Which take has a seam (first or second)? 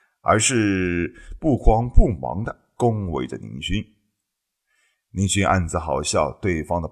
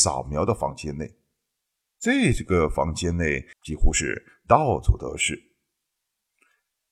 second